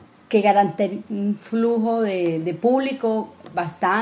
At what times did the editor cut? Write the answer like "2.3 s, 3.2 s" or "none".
1.0 s